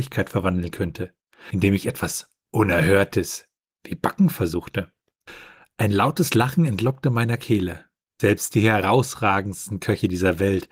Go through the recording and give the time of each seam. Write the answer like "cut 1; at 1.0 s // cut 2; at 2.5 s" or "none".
none